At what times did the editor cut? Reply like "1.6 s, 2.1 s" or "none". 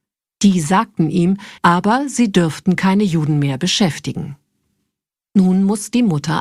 1.6 s